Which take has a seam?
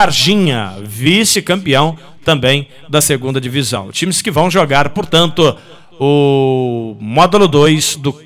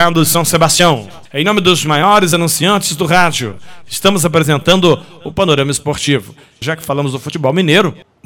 second; 2 cuts; at 1.3 s, 6.6 s

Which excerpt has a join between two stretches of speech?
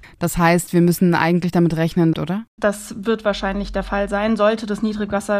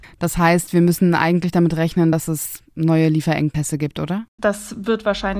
first; 1 cut; at 2.1 s

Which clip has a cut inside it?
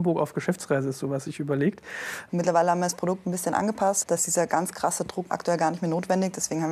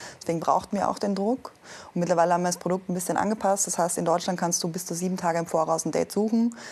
first; 2 cuts; at 2.3 s, 4.0 s

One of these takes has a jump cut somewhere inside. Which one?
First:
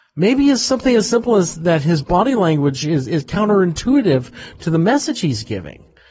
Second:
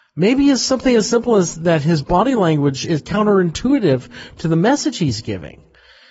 second; 1 cut; at 2.8 s

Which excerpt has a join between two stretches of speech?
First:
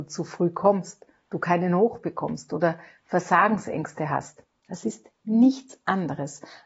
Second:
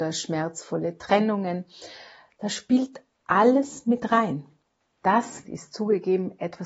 second; 1 cut; at 5.4 s

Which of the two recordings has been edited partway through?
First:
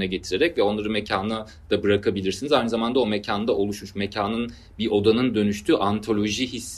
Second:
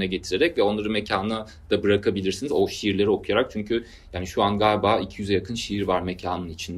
second; 1 cut; at 2.5 s

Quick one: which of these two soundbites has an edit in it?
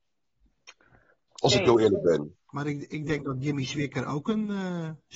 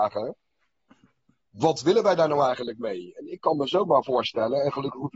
first; 1 cut; at 1.3 s

